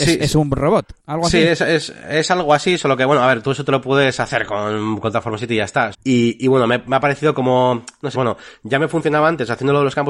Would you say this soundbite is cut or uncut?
cut